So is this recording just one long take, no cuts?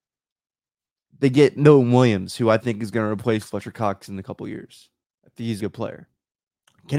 no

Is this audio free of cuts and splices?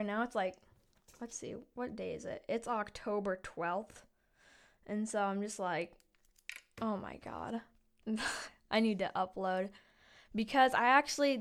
yes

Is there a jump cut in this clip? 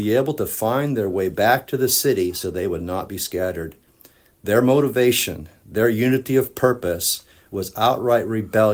no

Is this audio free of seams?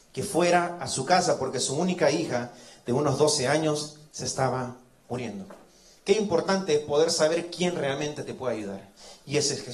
yes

